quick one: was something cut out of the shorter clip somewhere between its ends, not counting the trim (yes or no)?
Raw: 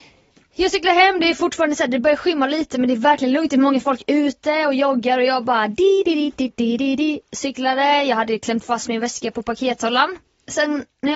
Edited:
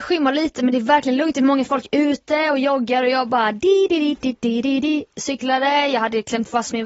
no